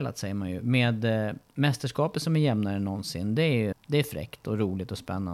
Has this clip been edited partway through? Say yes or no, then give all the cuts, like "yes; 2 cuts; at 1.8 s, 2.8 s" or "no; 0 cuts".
yes; 1 cut; at 3.7 s